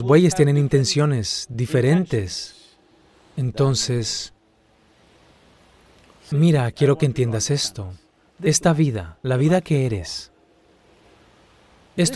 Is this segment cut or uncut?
uncut